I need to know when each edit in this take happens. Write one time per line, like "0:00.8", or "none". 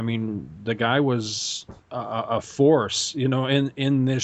0:01.8